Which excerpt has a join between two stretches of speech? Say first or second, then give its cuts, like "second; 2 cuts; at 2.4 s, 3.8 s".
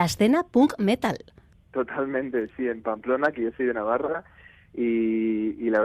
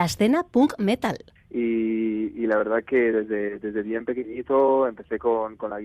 second; 1 cut; at 1.4 s